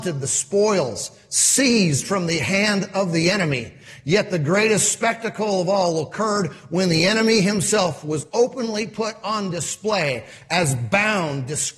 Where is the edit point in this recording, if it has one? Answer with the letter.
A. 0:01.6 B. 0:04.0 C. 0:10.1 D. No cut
D